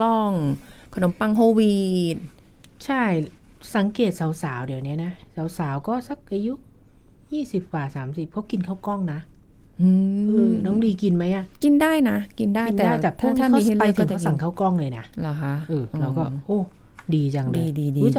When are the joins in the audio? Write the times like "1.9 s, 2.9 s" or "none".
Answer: 11.6 s